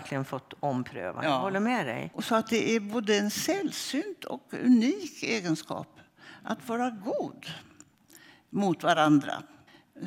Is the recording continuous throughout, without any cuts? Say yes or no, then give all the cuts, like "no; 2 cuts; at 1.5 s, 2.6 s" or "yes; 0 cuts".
no; 1 cut; at 2.1 s